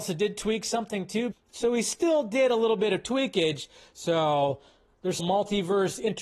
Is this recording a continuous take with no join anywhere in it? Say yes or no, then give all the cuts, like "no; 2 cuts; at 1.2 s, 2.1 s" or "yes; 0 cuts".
no; 2 cuts; at 1.3 s, 5.2 s